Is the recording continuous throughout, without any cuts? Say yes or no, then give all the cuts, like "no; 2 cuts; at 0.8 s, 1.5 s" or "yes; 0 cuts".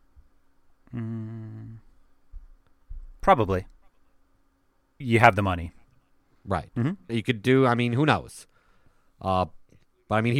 no; 2 cuts; at 5.0 s, 7.1 s